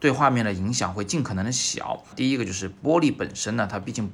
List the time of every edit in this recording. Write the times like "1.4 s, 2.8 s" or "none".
2.1 s